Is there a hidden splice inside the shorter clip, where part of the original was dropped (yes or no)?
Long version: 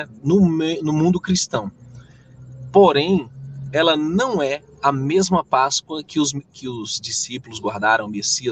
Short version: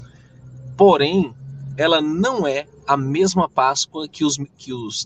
no